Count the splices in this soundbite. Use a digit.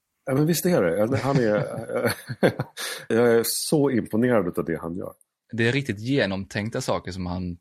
2